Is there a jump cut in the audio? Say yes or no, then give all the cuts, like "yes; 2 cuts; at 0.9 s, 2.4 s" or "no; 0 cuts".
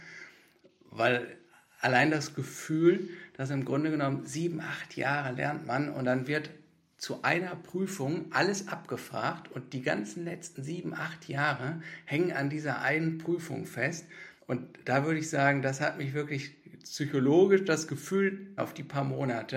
yes; 2 cuts; at 14.4 s, 18.6 s